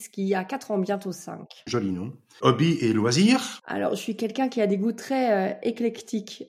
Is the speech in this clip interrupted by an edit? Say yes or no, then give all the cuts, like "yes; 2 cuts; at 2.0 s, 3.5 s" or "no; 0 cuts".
no; 0 cuts